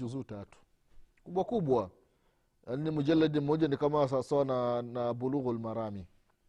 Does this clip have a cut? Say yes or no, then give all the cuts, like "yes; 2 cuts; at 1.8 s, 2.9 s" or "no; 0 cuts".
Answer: no; 0 cuts